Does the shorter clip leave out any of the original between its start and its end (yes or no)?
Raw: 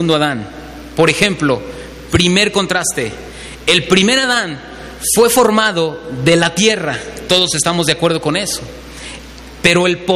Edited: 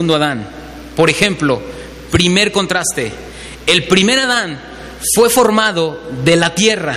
no